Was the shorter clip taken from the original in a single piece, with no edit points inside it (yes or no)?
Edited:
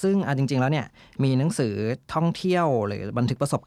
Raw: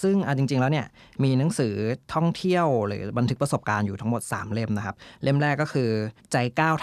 yes